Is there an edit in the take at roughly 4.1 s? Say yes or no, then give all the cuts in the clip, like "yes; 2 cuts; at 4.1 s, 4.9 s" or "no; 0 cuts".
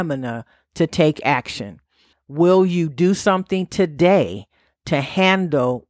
no; 1 cut; at 2.1 s